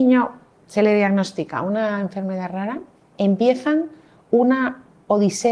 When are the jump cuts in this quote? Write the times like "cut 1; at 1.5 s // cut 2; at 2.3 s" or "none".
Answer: none

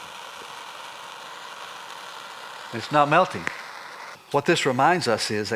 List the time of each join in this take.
cut 1; at 4.1 s

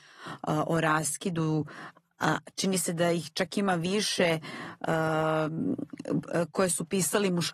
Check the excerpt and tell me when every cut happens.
none

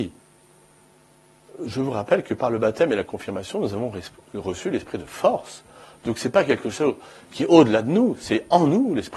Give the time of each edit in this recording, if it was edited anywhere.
none

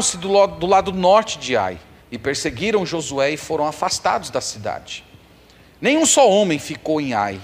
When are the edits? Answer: cut 1; at 2.0 s

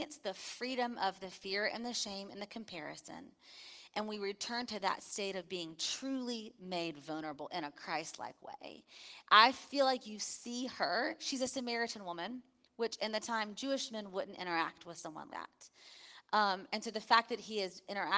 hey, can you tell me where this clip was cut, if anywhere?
cut 1; at 15.3 s

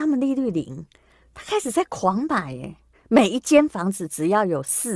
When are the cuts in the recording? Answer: cut 1; at 2.9 s

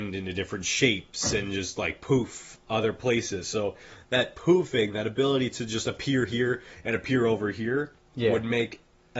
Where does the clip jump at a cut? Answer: none

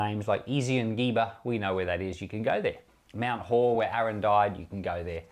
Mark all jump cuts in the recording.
none

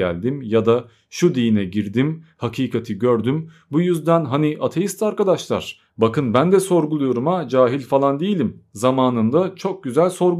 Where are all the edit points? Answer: none

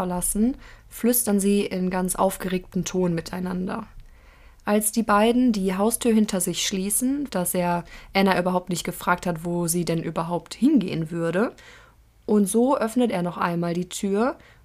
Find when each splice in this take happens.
cut 1; at 7.3 s

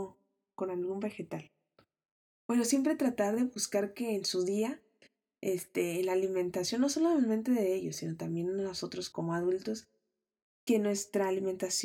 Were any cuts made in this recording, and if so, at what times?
cut 1; at 2.3 s // cut 2; at 9.1 s

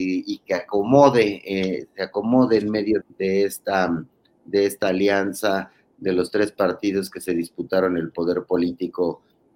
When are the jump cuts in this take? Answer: cut 1; at 3.0 s

